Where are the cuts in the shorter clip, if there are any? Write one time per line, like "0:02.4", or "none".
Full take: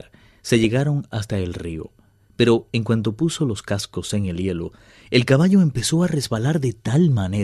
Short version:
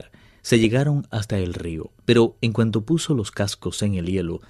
0:02.0